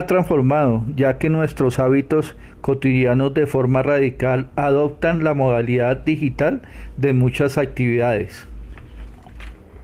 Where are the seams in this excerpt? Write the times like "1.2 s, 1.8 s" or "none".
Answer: none